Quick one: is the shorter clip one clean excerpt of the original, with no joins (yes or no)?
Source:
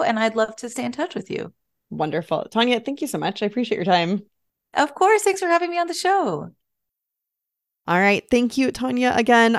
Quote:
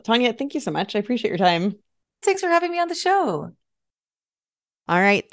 no